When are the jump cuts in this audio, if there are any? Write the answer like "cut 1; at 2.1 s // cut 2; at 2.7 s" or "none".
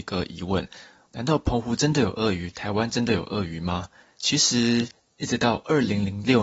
cut 1; at 1.1 s